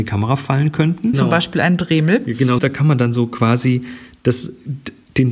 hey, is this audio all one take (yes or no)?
no